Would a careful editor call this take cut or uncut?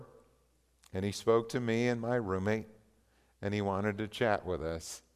uncut